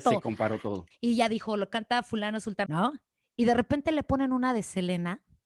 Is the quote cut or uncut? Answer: cut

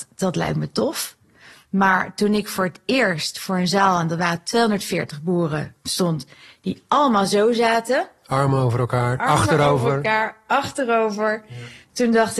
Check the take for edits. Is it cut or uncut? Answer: uncut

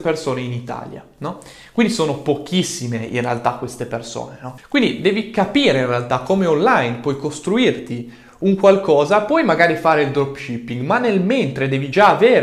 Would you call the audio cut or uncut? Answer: cut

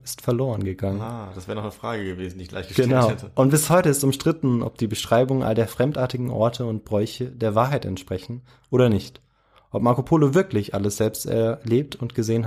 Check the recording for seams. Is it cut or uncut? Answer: uncut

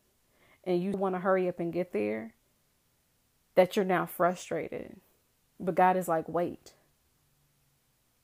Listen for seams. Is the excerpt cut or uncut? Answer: cut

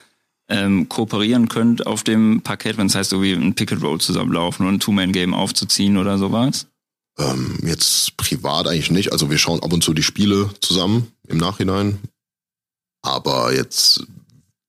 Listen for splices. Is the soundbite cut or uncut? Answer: uncut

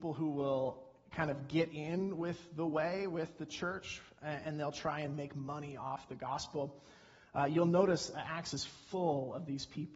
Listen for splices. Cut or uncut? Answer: uncut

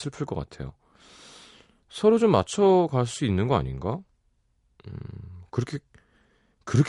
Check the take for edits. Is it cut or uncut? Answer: uncut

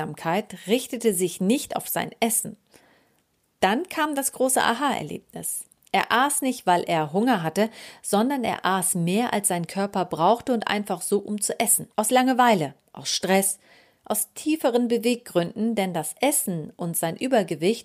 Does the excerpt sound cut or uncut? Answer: cut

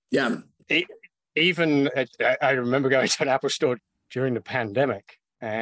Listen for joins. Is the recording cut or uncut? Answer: uncut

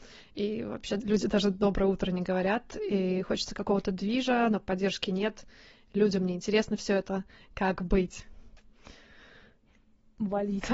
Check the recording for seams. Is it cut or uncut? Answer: uncut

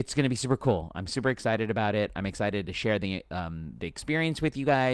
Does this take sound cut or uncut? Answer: uncut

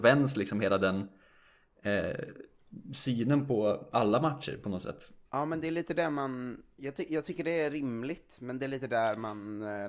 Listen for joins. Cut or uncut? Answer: cut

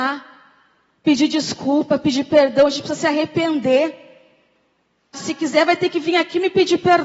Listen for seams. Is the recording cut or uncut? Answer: cut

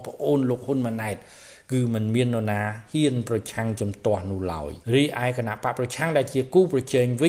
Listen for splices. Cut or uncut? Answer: cut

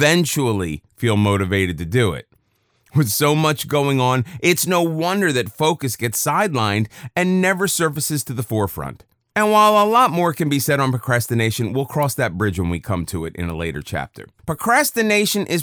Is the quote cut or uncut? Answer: cut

